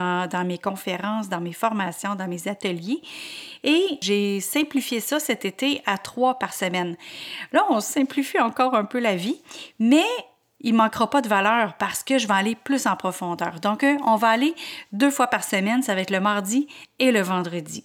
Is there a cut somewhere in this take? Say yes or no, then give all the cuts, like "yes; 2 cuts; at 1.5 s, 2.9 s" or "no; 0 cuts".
no; 0 cuts